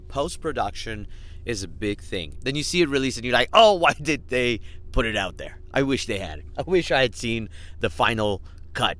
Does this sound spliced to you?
yes; 1 cut; at 2.3 s

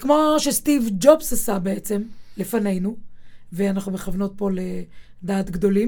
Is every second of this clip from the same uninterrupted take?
yes; 0 cuts

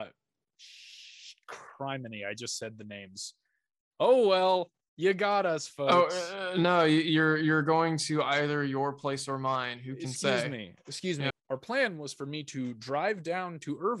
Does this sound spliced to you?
yes; 1 cut; at 11.3 s

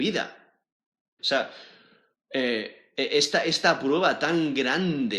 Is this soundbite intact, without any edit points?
no; 1 cut; at 1.2 s

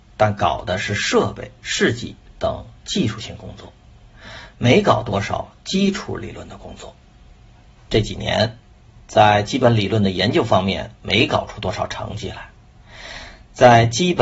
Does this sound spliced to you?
yes; 1 cut; at 7.8 s

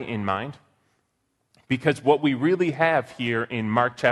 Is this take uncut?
yes; 0 cuts

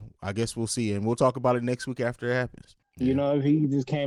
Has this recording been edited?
yes; 1 cut; at 2.8 s

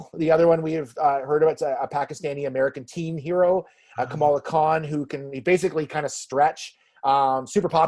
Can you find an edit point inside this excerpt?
no; 0 cuts

